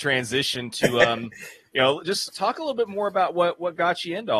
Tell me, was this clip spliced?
yes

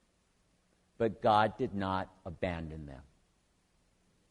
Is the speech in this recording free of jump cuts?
yes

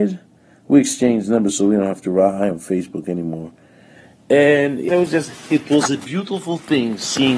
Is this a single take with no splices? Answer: no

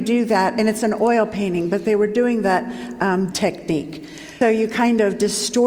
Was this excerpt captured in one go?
no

